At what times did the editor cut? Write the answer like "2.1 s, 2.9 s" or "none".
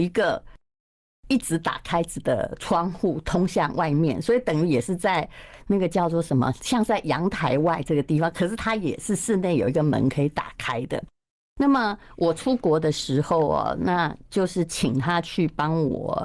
none